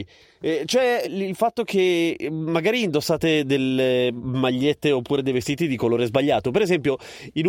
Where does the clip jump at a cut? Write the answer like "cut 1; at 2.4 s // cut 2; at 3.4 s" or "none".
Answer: cut 1; at 1.0 s